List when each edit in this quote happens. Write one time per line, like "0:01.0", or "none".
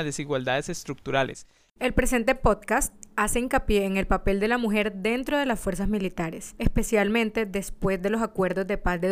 0:01.8